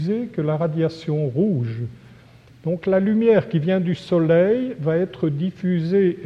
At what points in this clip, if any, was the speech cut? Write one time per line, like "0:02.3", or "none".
0:02.5